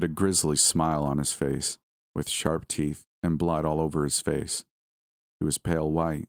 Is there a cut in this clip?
no; 0 cuts

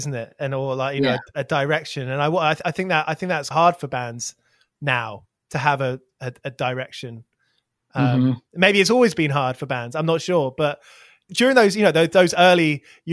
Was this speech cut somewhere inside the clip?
yes; 1 cut; at 3.5 s

